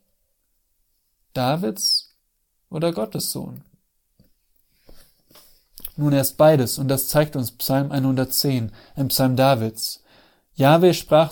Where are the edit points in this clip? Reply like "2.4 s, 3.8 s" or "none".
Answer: none